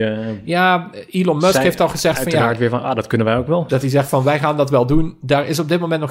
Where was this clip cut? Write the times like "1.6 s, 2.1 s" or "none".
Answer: 3.7 s